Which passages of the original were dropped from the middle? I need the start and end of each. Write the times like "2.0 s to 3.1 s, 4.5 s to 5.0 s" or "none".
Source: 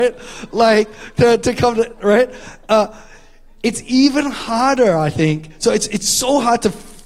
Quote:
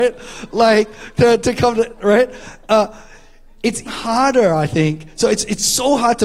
3.9 s to 4.3 s